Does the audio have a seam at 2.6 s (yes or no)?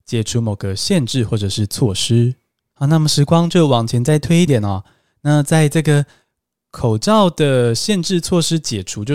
no